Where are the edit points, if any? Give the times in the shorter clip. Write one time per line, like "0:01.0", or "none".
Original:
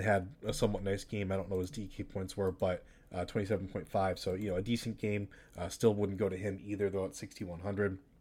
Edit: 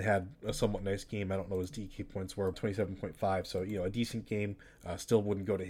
0:02.5